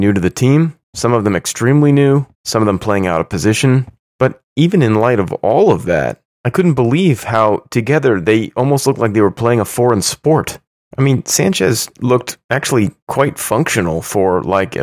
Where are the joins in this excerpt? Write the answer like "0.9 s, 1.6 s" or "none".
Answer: none